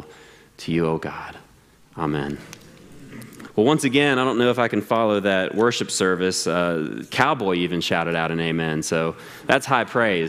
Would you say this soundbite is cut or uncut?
cut